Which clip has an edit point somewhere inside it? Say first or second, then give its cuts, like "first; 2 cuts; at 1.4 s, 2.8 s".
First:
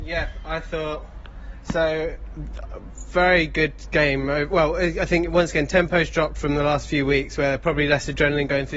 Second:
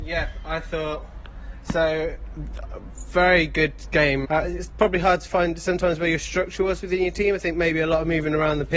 second; 1 cut; at 4.2 s